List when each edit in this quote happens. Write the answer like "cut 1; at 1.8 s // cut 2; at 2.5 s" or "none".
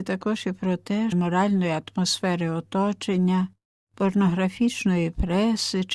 cut 1; at 1.1 s